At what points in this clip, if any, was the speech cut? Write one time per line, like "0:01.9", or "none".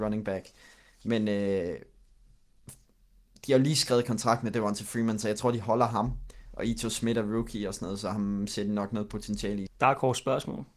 0:09.7